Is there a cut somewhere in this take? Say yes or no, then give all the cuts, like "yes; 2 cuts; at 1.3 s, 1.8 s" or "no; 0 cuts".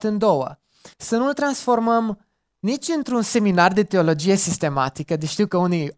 yes; 1 cut; at 0.9 s